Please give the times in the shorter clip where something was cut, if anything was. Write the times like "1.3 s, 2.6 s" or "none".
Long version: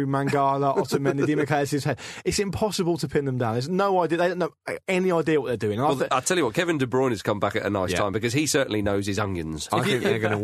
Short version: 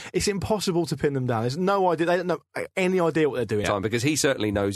3.6 s

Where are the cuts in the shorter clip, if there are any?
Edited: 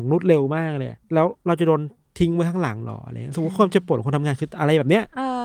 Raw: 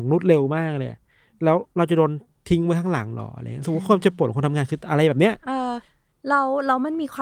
1.0 s

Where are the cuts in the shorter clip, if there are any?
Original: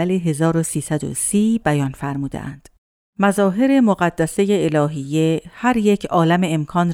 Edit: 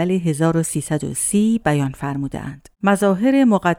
2.7 s

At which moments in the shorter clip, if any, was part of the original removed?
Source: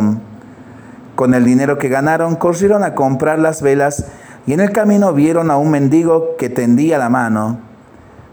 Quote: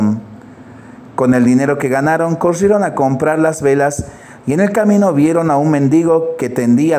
none

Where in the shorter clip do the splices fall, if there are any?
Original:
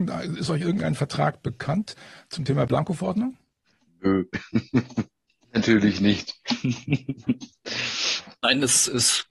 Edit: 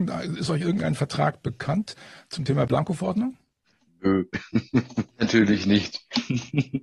5.1 s

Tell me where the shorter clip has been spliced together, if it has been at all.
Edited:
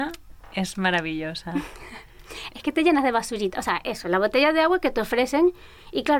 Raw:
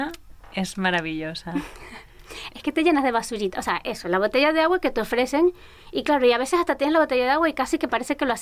none

